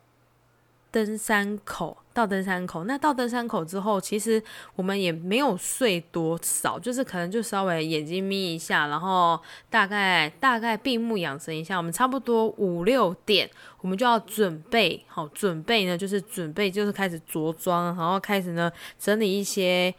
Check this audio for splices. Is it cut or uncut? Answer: uncut